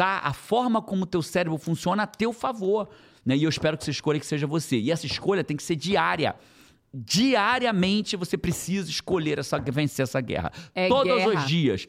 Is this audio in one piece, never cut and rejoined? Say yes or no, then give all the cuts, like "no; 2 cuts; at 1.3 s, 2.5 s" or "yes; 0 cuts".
no; 1 cut; at 3.2 s